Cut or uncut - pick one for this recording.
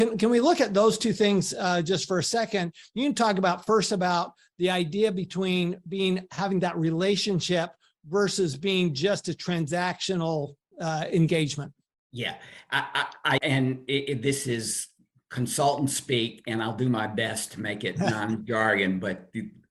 cut